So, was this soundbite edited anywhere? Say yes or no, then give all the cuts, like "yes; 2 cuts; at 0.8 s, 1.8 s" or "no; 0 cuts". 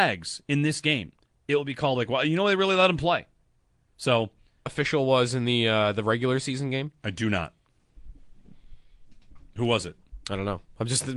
yes; 1 cut; at 4.7 s